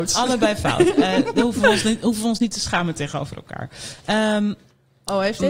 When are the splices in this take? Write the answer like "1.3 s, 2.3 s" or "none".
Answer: none